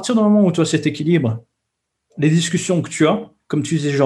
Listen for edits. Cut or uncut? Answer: uncut